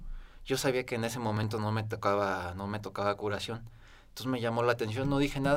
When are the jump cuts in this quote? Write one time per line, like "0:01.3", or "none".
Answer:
none